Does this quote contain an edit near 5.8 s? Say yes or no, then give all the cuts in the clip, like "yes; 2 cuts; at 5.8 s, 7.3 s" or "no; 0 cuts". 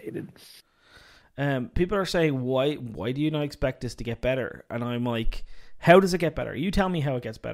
yes; 1 cut; at 5.8 s